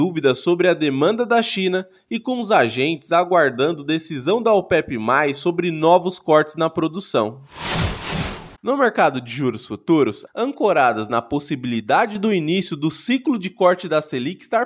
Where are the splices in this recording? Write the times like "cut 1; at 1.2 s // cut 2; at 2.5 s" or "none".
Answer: cut 1; at 8.6 s // cut 2; at 10.3 s